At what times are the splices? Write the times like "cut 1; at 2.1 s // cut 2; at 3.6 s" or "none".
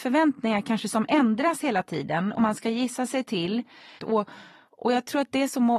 cut 1; at 4.0 s